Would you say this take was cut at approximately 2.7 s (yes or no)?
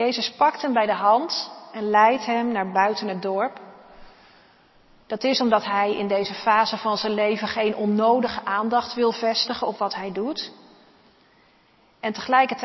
yes